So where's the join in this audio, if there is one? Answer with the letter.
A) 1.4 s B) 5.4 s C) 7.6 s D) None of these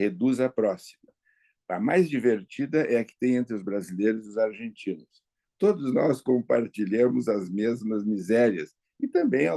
B